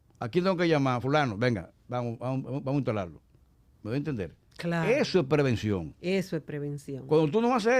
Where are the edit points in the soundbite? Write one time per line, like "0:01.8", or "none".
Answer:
none